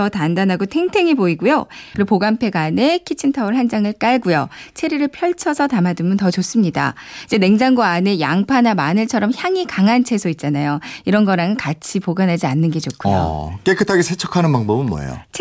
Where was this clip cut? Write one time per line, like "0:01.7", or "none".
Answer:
0:01.9